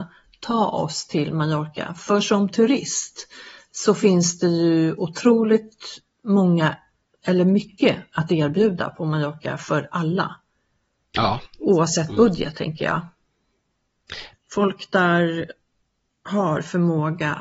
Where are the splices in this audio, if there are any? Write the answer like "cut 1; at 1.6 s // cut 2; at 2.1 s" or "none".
cut 1; at 14.3 s